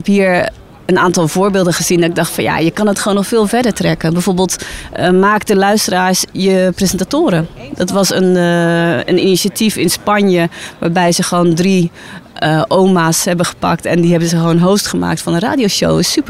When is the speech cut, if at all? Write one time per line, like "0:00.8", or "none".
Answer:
none